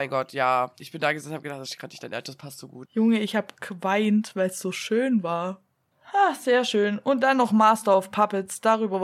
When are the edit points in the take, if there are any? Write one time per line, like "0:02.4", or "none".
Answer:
0:02.9
0:05.9

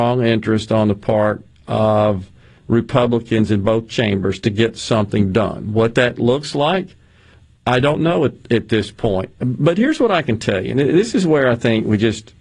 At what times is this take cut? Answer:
none

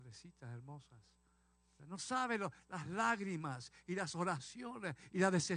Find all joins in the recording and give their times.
0:01.8

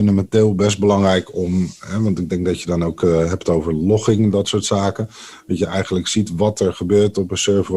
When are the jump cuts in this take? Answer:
none

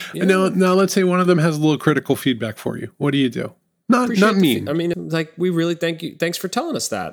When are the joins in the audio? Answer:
0:04.9

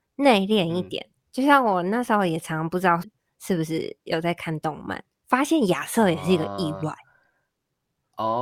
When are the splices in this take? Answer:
0:03.0

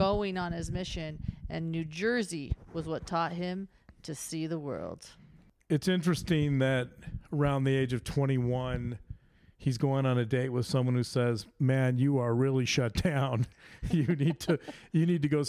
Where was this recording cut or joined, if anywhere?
none

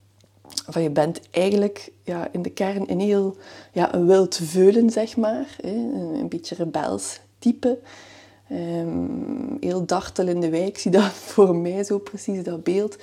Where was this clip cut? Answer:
none

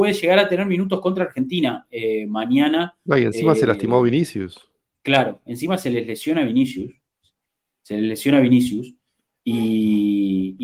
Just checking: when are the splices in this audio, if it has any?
none

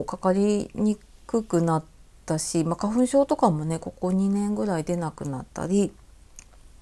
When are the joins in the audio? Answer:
none

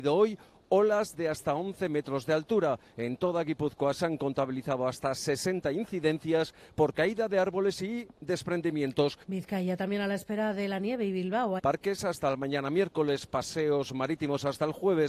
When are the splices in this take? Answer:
0:09.2
0:11.6

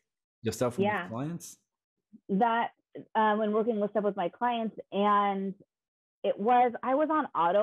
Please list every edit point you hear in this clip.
none

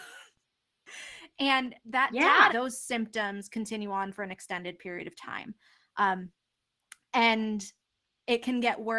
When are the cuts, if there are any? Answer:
0:02.5

